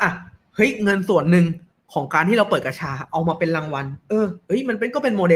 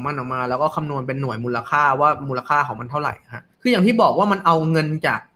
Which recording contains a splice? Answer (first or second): second